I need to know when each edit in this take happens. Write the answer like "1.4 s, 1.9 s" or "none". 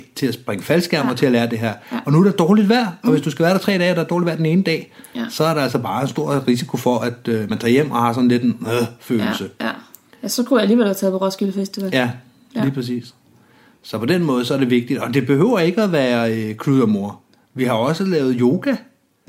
none